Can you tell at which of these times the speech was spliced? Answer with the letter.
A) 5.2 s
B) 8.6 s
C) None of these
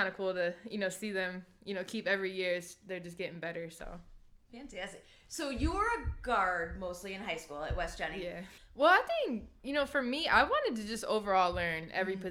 B